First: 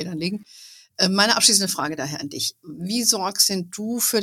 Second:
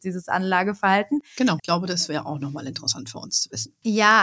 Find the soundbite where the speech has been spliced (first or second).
second